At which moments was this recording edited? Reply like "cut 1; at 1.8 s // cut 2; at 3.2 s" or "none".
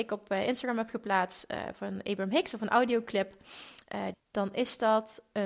cut 1; at 4.1 s